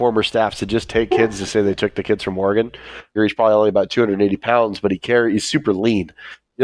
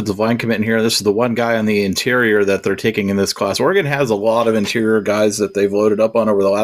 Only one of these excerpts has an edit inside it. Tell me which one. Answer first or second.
first